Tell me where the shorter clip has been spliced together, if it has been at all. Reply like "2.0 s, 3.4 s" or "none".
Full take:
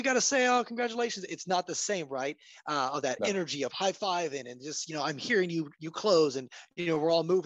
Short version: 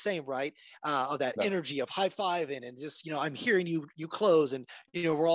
none